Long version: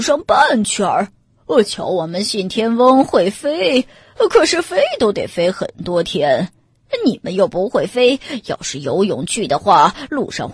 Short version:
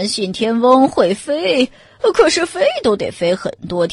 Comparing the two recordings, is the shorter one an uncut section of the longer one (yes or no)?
yes